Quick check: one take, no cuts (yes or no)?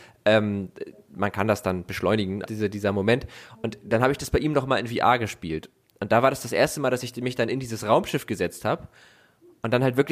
no